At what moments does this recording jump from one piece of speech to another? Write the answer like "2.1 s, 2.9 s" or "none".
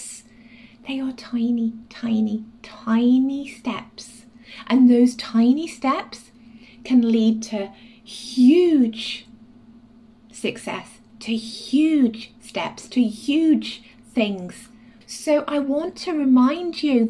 12.9 s, 15.0 s